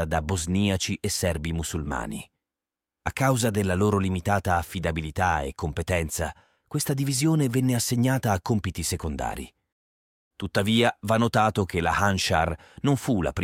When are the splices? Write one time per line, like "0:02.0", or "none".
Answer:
none